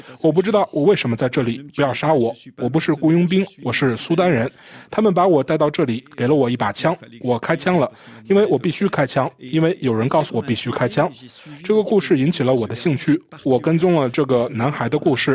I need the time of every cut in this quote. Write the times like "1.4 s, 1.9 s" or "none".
10.3 s